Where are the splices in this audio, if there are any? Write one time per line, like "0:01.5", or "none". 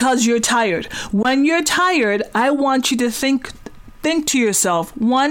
none